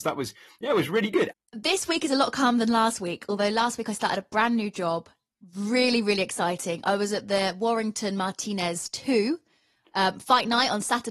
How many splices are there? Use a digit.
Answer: 1